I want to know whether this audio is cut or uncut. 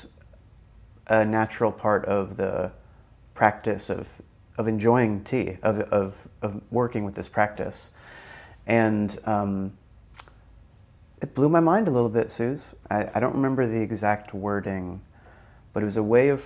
cut